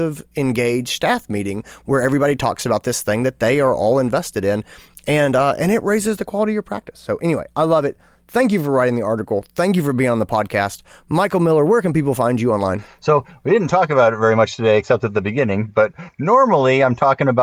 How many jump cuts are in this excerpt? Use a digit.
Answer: 0